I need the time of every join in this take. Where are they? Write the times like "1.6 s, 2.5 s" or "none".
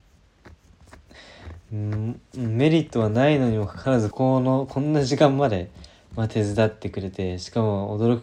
4.1 s